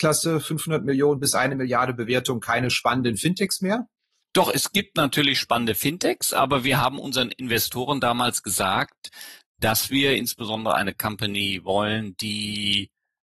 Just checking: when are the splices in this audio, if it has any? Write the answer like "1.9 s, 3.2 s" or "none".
none